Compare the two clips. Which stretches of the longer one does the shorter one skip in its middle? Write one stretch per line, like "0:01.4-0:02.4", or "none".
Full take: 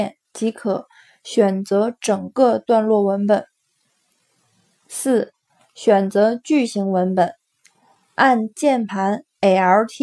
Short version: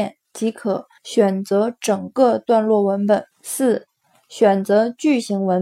0:01.0-0:01.2
0:03.5-0:04.8